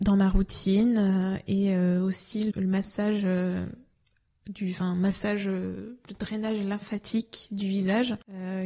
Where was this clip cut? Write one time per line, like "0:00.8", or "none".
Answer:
0:02.5

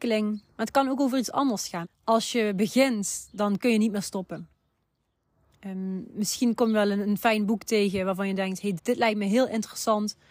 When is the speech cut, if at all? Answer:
0:01.8
0:08.8

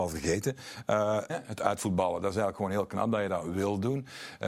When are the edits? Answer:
0:01.3

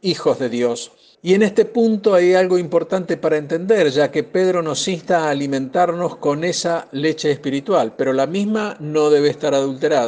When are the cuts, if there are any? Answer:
0:01.1

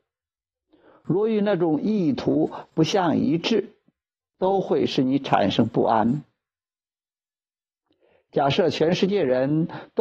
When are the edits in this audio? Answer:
none

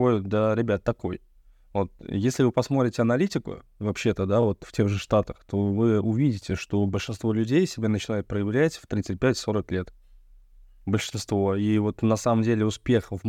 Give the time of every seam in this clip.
none

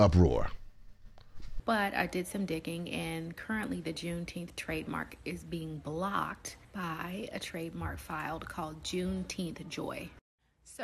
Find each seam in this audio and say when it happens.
0:01.6
0:06.6

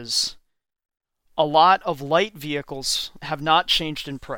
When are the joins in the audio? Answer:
0:03.2

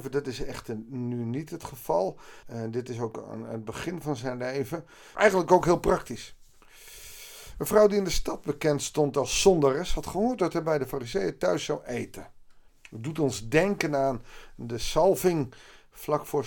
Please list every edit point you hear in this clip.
0:02.4
0:05.1
0:12.7

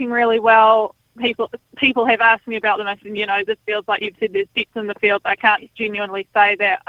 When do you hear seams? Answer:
none

